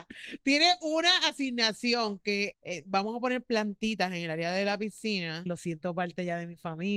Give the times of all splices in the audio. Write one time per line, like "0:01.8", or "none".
0:02.5
0:05.5